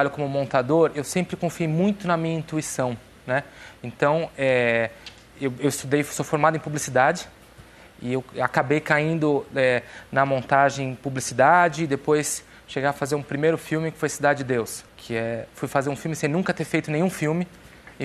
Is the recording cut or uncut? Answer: cut